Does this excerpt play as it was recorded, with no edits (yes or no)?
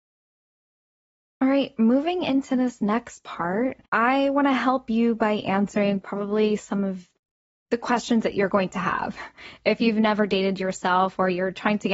no